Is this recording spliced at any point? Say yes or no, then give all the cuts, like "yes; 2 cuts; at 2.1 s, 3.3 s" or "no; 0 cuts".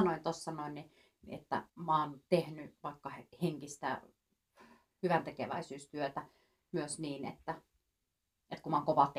yes; 1 cut; at 1.7 s